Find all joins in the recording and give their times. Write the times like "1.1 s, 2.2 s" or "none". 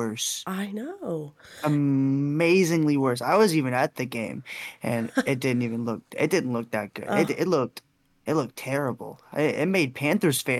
none